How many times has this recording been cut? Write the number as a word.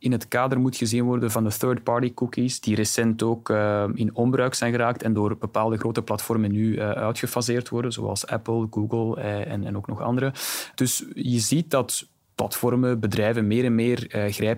zero